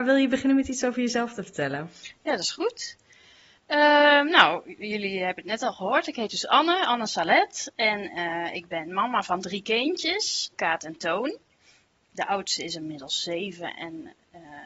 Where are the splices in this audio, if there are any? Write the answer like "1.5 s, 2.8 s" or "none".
10.5 s